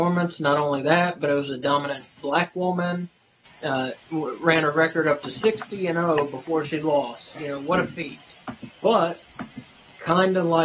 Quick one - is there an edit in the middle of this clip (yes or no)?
yes